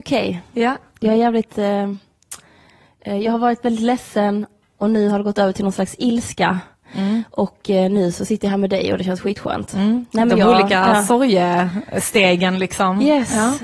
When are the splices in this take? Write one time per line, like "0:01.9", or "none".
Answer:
none